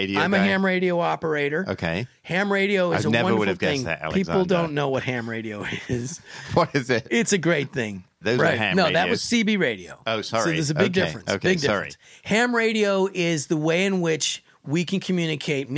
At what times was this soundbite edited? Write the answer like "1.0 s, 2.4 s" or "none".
8.2 s